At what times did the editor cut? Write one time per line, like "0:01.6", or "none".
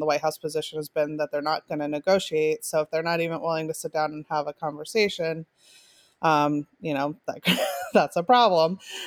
none

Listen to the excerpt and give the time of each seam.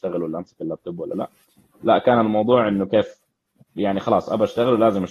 none

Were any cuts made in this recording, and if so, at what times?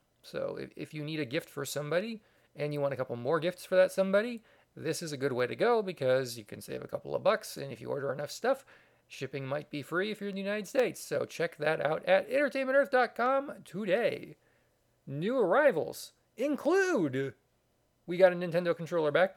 none

